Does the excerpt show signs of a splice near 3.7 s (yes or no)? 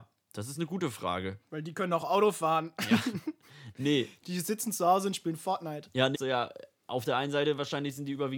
no